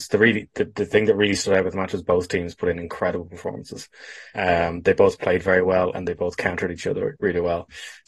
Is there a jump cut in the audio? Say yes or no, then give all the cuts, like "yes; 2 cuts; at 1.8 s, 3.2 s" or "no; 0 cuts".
yes; 1 cut; at 4.3 s